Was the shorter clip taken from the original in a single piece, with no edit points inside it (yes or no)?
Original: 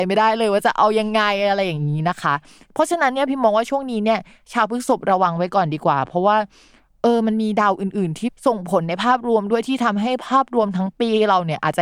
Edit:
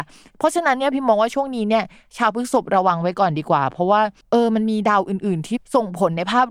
no